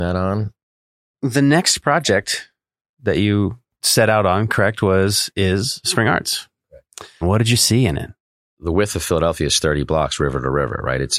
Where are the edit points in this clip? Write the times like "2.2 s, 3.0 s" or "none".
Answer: 7.2 s